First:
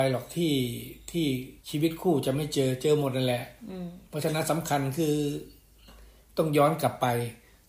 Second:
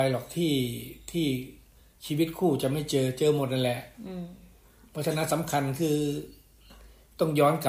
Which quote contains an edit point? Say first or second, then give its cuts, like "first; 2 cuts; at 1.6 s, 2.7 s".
first; 2 cuts; at 1.6 s, 4.0 s